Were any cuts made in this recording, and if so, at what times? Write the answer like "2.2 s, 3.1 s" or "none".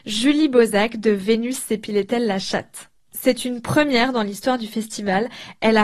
none